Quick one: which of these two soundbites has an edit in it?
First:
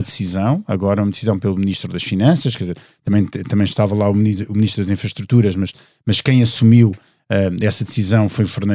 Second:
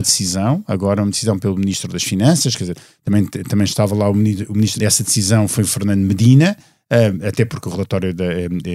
second; 1 cut; at 4.8 s

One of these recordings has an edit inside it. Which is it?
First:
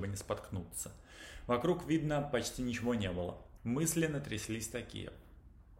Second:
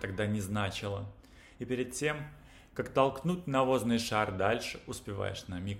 first; 1 cut; at 3.6 s

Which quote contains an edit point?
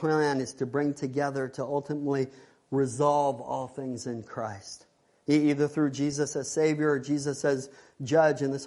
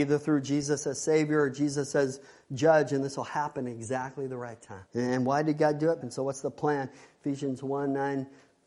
second; 2 cuts; at 4.9 s, 6.0 s

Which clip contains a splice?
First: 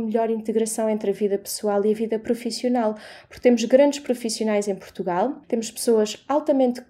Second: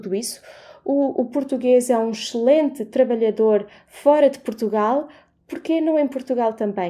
first; 1 cut; at 5.4 s

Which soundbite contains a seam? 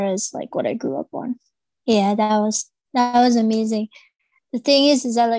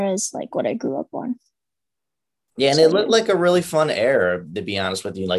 first; 1 cut; at 1.8 s

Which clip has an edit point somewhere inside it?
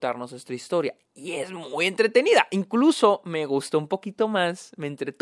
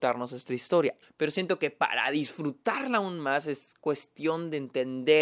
second; 1 cut; at 1.0 s

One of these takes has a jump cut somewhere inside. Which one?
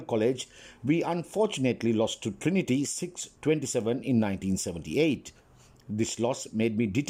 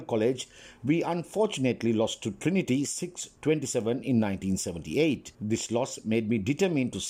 second; 1 cut; at 5.3 s

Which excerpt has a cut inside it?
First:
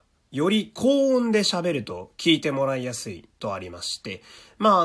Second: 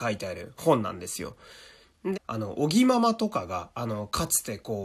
second; 1 cut; at 2.1 s

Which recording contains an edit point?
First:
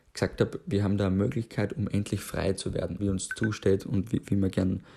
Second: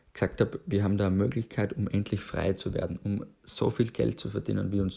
first; 1 cut; at 3.0 s

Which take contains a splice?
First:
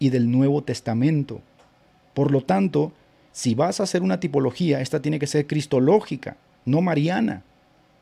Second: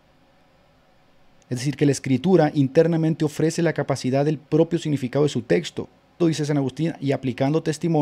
second; 2 cuts; at 1.4 s, 6.2 s

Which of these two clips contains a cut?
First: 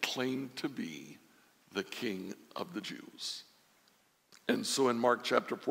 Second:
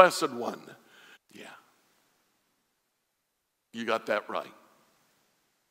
second; 1 cut; at 1.2 s

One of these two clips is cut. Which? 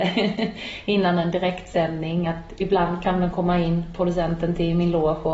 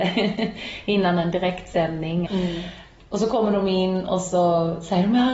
second; 1 cut; at 2.3 s

